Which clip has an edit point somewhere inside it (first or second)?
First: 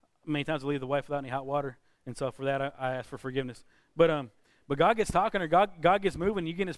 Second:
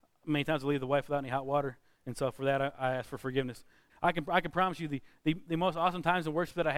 second